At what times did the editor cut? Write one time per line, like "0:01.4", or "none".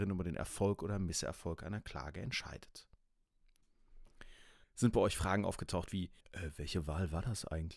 0:04.6
0:06.2